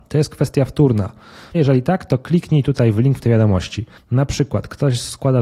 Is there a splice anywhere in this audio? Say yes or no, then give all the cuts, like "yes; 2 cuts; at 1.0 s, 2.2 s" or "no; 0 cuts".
yes; 2 cuts; at 1.5 s, 4.0 s